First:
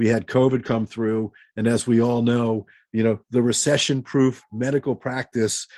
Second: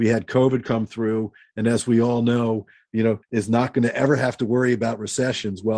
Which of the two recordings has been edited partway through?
second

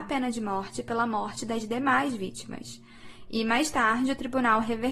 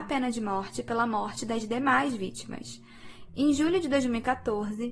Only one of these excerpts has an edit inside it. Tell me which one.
second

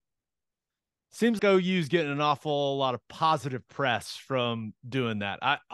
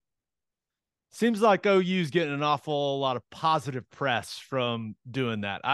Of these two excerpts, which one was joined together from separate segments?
first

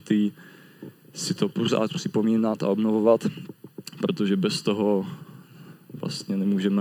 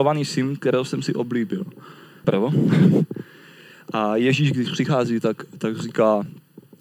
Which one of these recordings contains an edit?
second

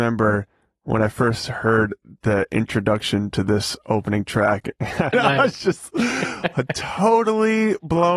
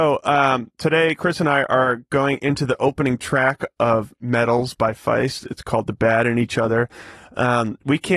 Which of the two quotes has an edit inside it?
first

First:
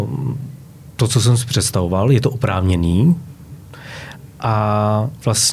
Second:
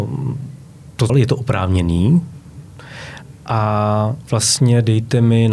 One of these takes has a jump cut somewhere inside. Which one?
second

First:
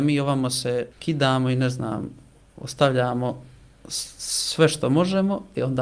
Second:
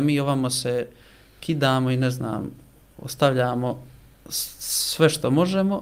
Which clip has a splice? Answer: first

